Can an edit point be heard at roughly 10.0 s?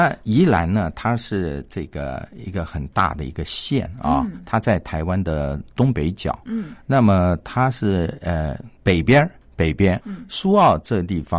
yes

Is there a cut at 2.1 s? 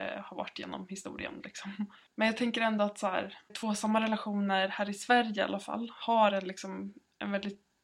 yes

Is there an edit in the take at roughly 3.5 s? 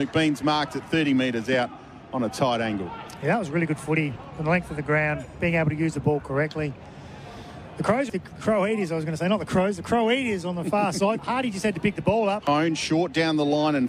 no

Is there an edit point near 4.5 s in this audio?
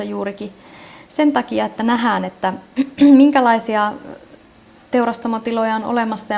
no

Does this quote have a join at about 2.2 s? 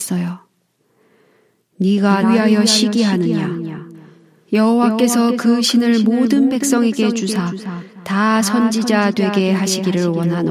yes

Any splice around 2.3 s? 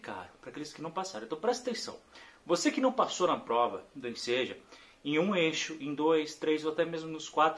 no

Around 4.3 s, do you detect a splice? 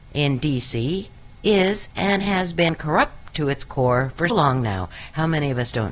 yes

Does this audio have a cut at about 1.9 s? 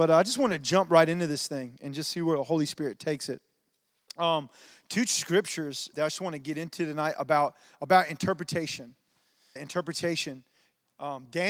no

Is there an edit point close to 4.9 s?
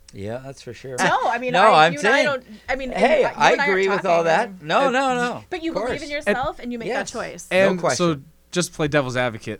no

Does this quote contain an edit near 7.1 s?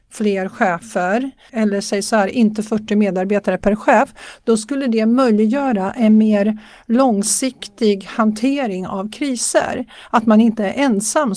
no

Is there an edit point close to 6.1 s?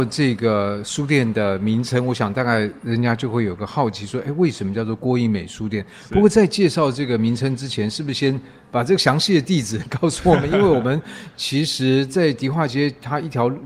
no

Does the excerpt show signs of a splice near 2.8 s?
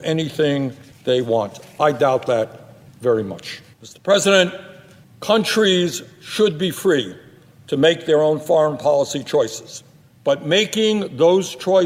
no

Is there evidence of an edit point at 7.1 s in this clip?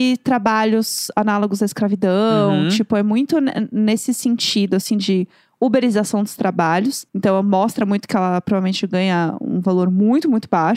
yes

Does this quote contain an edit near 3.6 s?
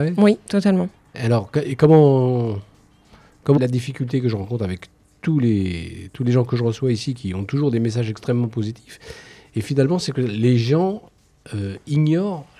yes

